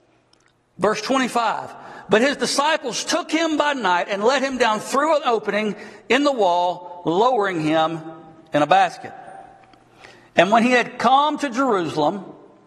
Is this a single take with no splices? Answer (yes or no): yes